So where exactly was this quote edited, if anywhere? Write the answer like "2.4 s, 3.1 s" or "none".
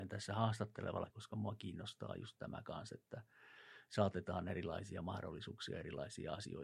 1.1 s